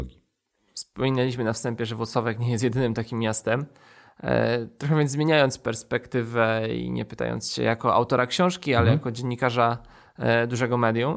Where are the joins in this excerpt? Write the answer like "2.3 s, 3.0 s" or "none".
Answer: none